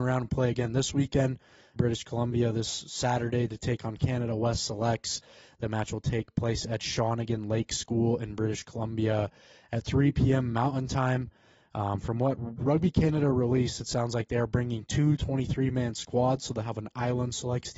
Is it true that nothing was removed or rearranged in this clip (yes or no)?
no